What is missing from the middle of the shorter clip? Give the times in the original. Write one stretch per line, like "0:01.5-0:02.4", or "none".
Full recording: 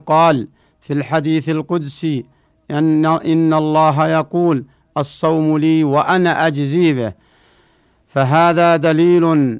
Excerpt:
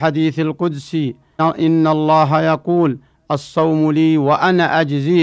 0:02.5-0:03.1